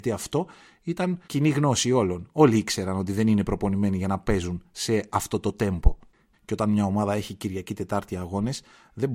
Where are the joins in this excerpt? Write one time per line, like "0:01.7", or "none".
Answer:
0:01.2
0:06.3